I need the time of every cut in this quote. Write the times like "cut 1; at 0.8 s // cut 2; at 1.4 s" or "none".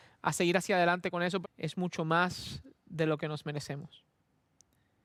cut 1; at 1.4 s